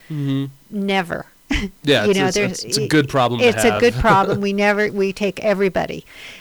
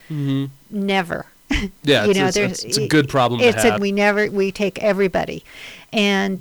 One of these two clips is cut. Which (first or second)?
second